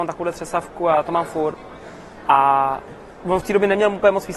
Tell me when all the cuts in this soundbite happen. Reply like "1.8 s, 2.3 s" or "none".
2.2 s